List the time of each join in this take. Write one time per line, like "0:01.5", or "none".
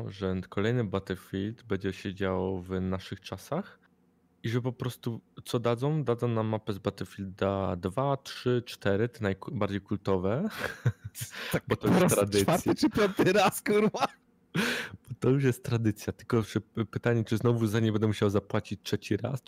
none